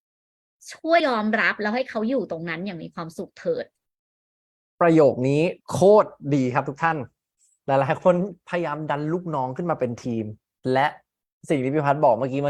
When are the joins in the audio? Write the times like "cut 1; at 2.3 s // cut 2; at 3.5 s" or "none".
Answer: cut 1; at 1.0 s // cut 2; at 5.6 s